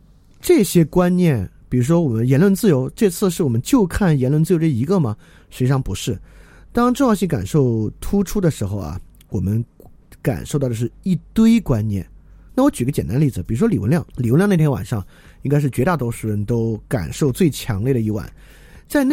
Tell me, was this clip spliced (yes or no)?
yes